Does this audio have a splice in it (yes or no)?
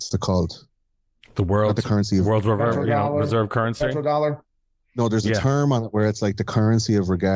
no